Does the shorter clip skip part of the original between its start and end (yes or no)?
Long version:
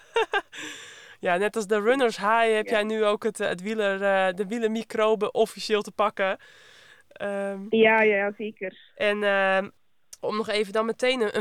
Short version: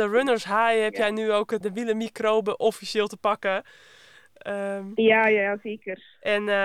yes